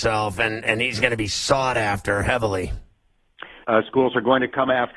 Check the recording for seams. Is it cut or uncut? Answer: cut